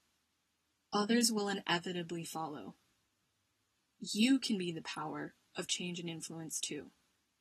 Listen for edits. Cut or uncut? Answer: uncut